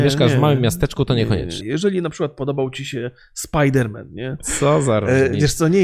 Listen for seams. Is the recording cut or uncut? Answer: cut